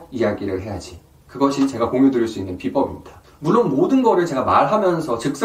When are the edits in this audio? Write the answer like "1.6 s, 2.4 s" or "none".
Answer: 1.2 s